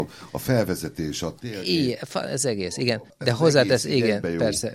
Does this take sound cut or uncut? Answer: uncut